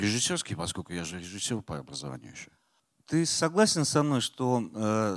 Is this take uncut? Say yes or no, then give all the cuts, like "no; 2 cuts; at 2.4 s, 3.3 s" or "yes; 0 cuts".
yes; 0 cuts